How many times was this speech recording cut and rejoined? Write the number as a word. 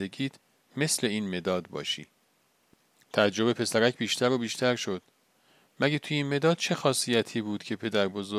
zero